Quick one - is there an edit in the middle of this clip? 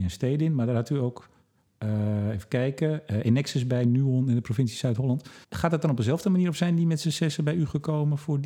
yes; 1 cut; at 5.4 s

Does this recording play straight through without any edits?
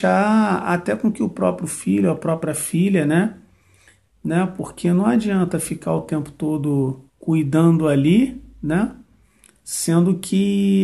no; 2 cuts; at 4.1 s, 7.1 s

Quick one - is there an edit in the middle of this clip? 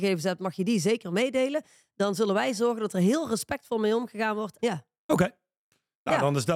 yes; 1 cut; at 4.6 s

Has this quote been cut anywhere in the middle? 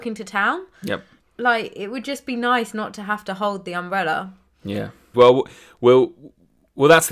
yes; 2 cuts; at 1.2 s, 5.1 s

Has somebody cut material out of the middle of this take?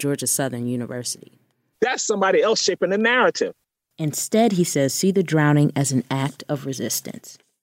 yes; 1 cut; at 1.7 s

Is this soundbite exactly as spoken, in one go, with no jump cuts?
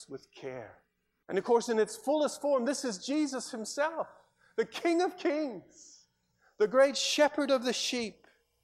no; 1 cut; at 1.2 s

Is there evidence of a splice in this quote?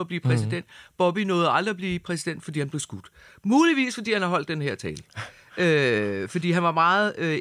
no; 0 cuts

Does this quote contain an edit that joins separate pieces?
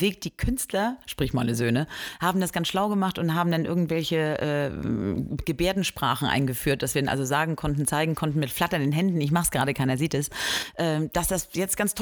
no; 0 cuts

